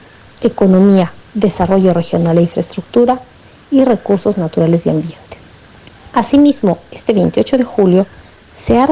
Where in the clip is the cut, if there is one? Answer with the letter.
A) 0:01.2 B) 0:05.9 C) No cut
A